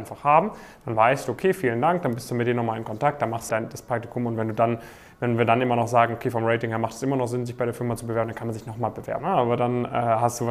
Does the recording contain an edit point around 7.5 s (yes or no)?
no